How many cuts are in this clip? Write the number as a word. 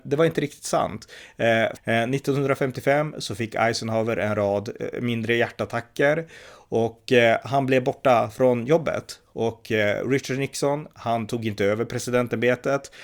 one